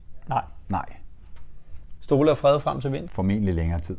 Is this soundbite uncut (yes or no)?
no